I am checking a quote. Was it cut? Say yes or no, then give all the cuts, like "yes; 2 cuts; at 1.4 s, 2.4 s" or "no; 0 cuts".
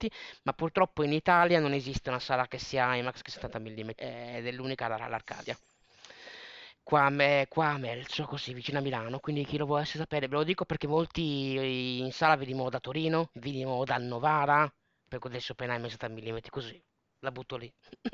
yes; 1 cut; at 3.9 s